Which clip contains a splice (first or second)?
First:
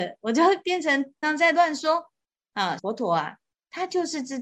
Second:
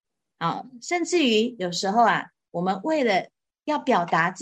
first